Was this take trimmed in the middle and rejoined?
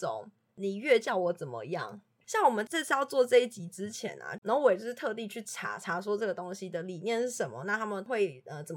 yes; 2 cuts; at 2.2 s, 4.4 s

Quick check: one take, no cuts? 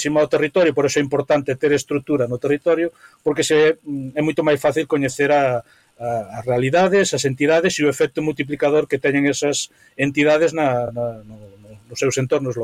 yes; 0 cuts

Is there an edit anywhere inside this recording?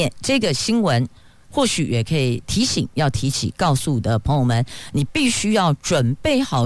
yes; 1 cut; at 1.4 s

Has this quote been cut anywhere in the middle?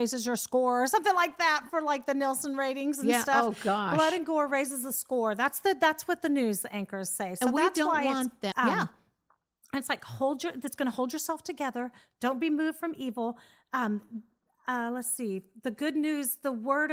yes; 1 cut; at 8.5 s

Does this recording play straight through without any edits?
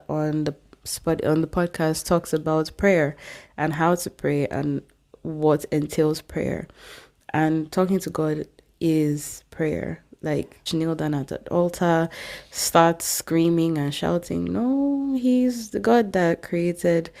no; 1 cut; at 10.7 s

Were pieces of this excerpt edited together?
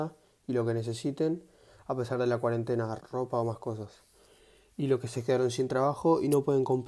yes; 1 cut; at 3.0 s

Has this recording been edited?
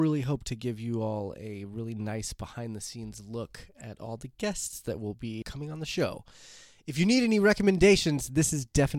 yes; 1 cut; at 5.4 s

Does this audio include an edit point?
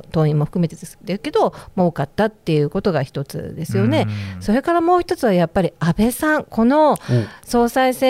no; 0 cuts

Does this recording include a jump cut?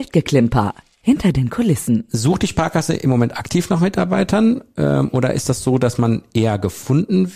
no; 0 cuts

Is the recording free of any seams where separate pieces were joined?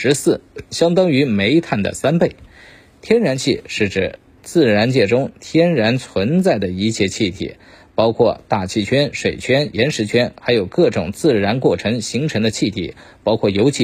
yes; 0 cuts

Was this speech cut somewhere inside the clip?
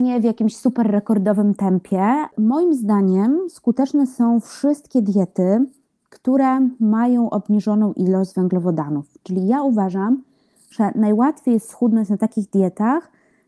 no; 0 cuts

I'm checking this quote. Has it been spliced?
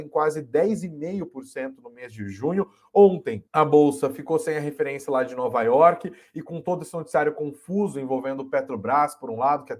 yes; 1 cut; at 3.5 s

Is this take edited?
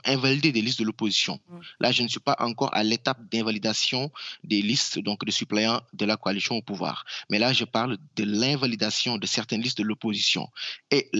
no; 0 cuts

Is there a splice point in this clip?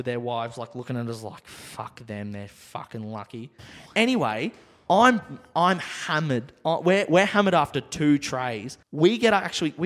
yes; 1 cut; at 8.8 s

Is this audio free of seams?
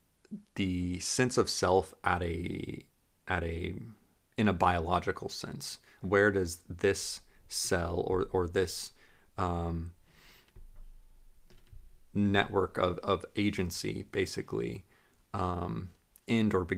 no; 1 cut; at 6.0 s

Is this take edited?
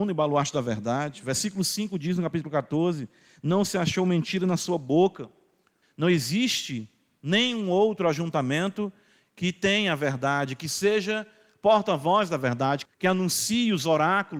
yes; 2 cuts; at 5.8 s, 12.9 s

